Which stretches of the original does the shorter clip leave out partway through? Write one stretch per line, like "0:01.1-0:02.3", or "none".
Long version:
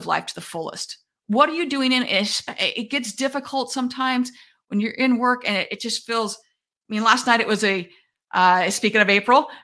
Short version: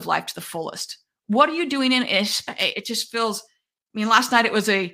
0:02.7-0:05.7